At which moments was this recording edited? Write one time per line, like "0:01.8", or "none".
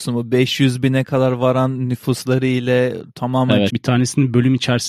0:03.7